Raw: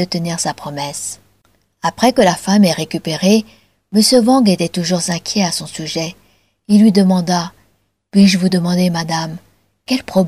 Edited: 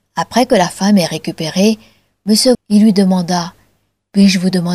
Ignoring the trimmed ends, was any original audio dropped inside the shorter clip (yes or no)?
yes